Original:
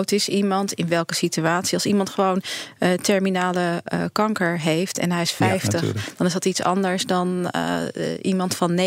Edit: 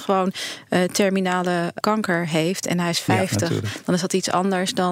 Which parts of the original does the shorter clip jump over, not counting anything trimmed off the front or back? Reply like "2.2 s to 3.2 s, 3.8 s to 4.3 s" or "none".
3.9 s to 4.1 s